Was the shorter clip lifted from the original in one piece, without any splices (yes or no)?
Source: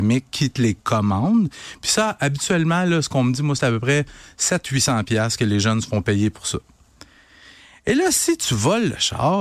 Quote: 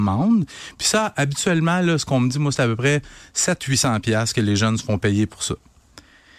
yes